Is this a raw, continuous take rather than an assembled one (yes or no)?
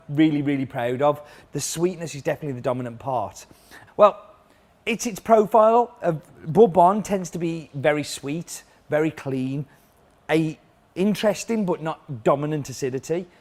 no